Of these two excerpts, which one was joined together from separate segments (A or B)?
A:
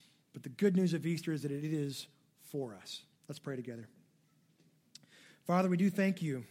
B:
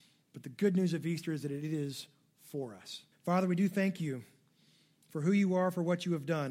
B